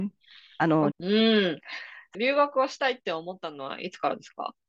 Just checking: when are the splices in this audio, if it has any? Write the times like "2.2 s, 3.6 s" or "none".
0.9 s, 2.1 s